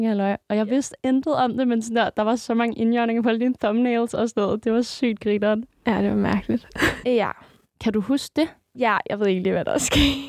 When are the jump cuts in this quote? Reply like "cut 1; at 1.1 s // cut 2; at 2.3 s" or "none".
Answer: cut 1; at 7.0 s // cut 2; at 8.7 s